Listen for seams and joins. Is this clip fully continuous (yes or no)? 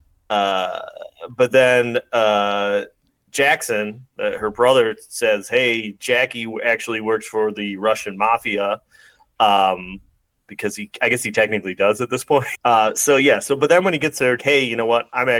no